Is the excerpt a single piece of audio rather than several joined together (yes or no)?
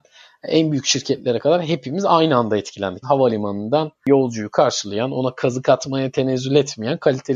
no